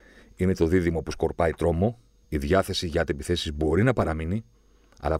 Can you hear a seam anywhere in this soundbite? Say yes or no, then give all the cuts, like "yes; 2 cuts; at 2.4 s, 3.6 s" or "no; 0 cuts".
yes; 1 cut; at 2.2 s